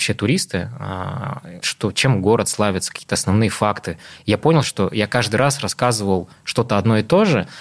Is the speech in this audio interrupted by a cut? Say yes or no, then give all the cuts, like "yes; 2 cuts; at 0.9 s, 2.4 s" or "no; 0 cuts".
yes; 2 cuts; at 1.6 s, 4.6 s